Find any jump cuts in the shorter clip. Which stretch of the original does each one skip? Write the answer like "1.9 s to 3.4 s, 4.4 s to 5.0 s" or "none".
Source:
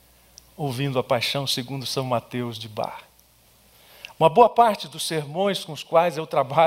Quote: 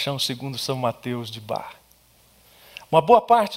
none